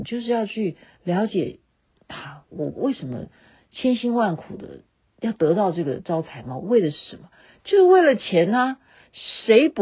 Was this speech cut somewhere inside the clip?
no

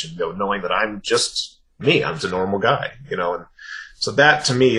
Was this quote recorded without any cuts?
no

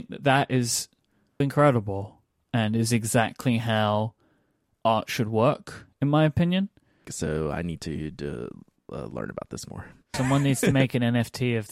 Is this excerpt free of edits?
no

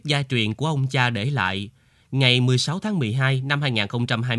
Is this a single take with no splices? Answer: yes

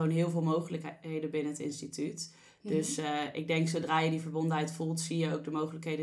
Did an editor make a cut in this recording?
no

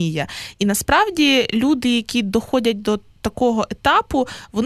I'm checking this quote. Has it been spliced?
no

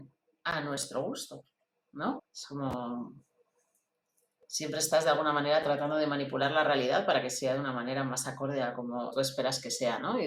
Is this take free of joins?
no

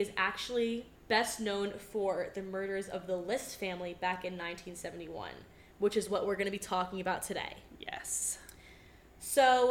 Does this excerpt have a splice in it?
yes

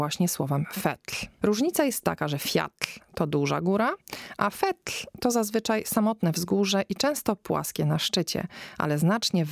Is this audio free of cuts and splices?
no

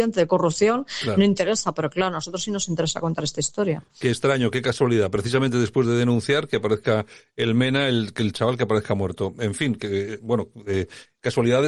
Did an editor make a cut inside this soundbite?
no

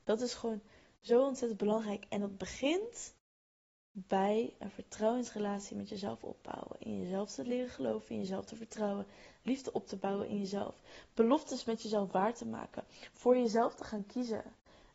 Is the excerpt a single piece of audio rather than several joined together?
yes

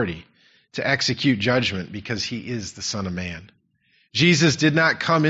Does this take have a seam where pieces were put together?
no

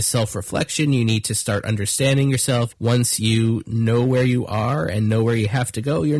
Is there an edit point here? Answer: yes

